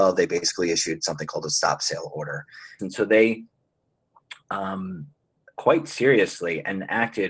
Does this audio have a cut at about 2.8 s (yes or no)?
yes